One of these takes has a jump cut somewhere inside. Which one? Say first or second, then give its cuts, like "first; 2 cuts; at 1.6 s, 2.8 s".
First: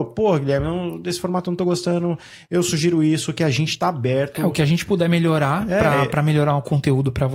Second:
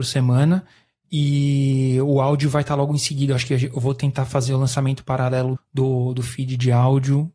second; 1 cut; at 5.5 s